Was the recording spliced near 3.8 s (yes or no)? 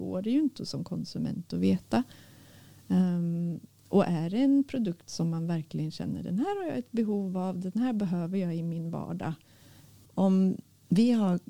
no